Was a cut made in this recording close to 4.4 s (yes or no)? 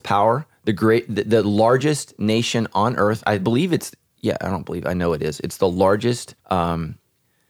no